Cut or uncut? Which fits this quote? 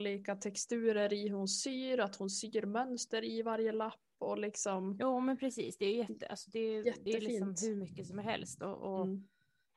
uncut